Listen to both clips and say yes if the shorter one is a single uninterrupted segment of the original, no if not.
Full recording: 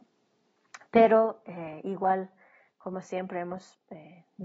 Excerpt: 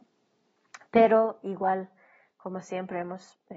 no